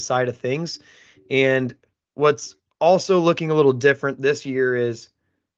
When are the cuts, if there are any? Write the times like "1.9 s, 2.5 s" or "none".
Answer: none